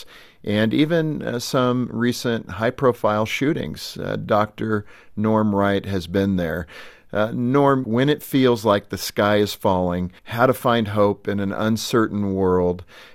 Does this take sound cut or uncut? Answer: cut